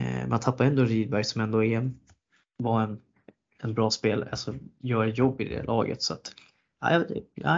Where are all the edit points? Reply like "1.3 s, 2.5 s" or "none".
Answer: none